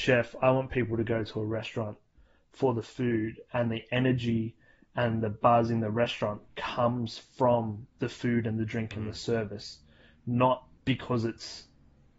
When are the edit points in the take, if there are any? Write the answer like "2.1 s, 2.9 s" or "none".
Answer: 10.8 s